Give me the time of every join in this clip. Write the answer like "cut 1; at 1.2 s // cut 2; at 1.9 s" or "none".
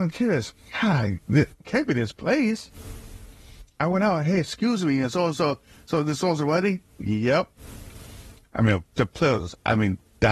none